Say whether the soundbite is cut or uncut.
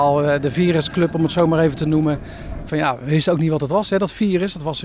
cut